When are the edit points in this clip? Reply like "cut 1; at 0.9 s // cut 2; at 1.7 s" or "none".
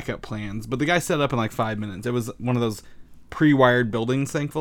none